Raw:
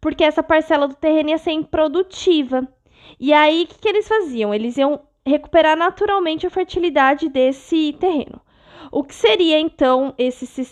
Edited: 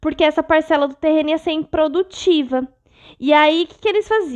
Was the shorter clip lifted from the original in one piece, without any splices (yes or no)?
yes